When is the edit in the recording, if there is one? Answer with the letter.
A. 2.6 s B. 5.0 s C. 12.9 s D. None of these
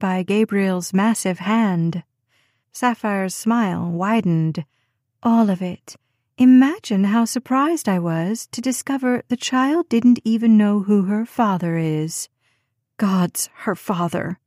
A